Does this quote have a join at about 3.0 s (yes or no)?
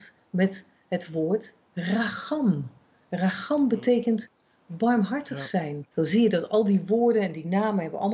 no